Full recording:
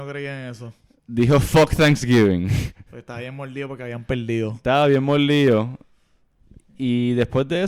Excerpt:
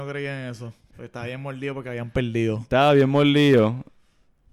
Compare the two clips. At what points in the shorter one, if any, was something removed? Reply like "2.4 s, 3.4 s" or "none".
0.9 s

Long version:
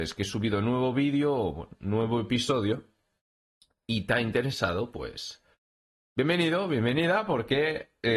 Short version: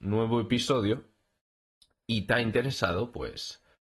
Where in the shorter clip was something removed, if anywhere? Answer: none

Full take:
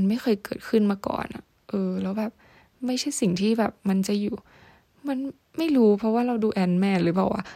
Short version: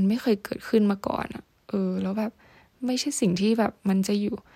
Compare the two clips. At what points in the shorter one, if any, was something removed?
none

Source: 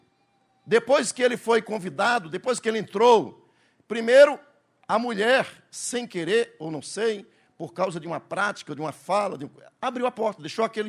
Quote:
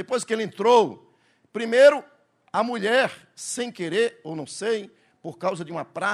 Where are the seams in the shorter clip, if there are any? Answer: none

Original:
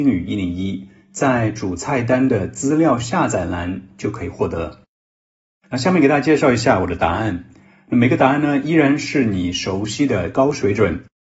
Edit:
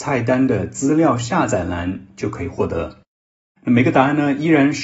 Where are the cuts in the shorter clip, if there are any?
3.6 s

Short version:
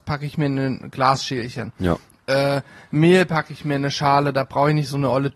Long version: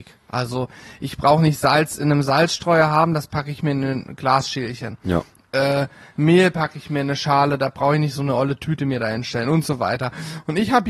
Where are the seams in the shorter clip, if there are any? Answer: none

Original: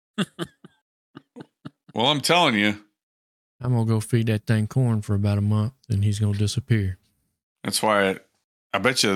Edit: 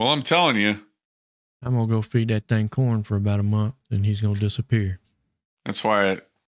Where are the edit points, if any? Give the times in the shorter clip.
none

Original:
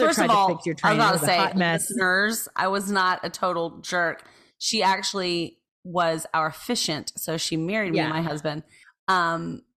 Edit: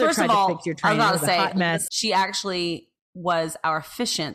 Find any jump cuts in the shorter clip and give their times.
1.9 s

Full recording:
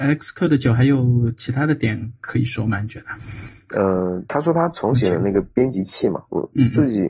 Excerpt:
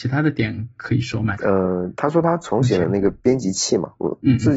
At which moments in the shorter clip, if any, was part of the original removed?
1.3 s

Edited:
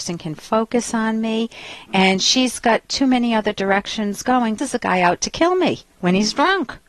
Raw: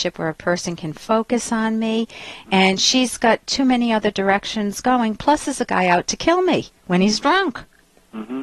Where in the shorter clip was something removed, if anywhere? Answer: 4.6 s

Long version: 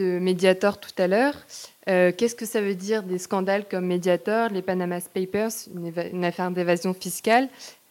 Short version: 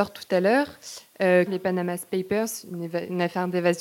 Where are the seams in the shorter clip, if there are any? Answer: 1.5 s

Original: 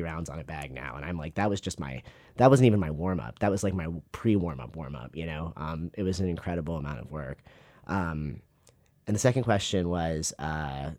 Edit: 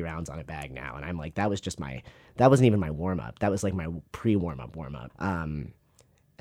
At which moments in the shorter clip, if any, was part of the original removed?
5.1 s

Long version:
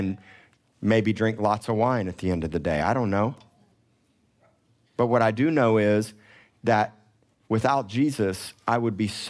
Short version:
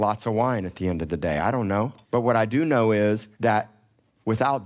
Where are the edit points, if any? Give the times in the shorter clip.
2.0 s, 3.3 s

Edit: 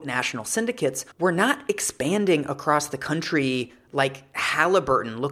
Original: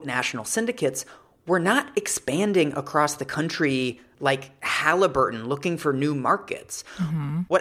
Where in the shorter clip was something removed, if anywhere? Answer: 1.1 s

